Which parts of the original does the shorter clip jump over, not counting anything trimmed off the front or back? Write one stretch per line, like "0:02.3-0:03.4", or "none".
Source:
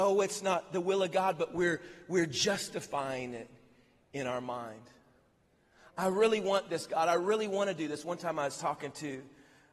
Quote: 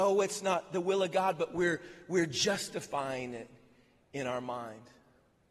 none